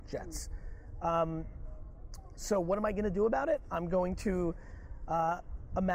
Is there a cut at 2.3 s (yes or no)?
no